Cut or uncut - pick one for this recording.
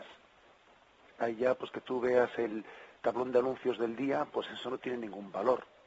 uncut